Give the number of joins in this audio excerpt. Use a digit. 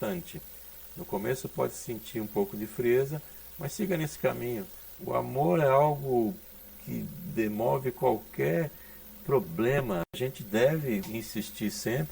1